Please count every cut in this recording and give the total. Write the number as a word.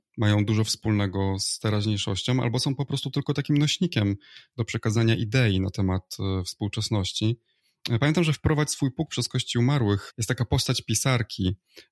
zero